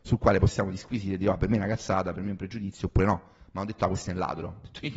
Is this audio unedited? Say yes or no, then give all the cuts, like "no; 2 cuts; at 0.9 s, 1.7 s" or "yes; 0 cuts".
yes; 0 cuts